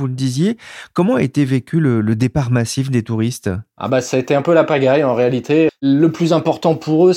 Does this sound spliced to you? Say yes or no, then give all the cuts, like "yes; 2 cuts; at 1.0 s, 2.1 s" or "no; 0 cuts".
yes; 1 cut; at 5.7 s